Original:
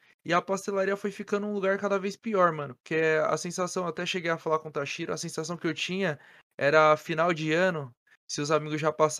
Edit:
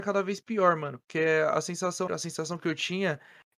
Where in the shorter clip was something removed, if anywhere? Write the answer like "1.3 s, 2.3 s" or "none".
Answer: 2.1 s